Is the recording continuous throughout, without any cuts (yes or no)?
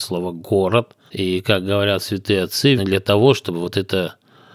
no